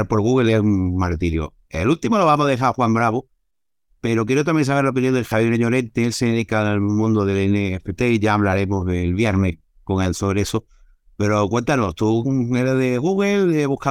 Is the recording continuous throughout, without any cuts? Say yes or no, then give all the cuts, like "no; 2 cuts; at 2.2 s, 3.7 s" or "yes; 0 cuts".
yes; 0 cuts